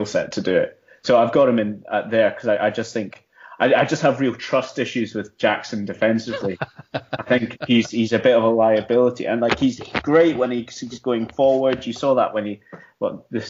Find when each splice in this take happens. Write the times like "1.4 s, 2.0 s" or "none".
none

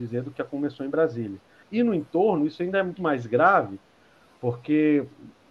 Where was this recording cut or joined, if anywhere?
1.6 s, 3.0 s

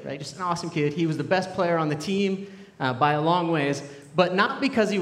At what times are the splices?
none

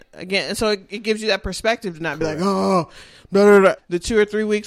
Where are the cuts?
3.8 s

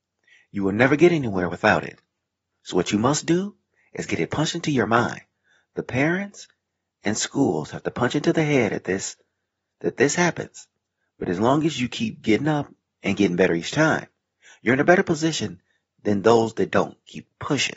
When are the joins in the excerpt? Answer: none

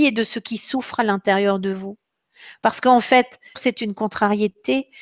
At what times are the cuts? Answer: 3.6 s

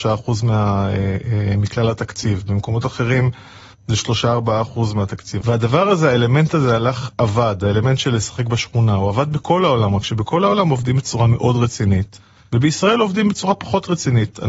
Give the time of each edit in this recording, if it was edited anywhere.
5.4 s

